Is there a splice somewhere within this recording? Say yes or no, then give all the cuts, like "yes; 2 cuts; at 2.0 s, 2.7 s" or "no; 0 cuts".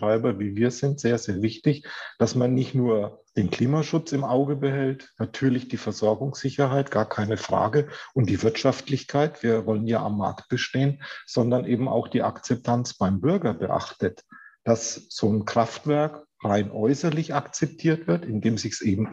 yes; 1 cut; at 3.3 s